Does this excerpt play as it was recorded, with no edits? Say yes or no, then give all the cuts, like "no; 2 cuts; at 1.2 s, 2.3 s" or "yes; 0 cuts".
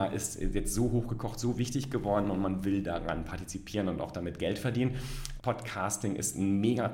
no; 1 cut; at 5.4 s